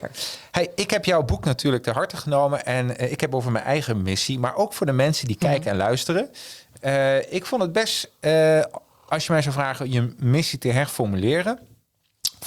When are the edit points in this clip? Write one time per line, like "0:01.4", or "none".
none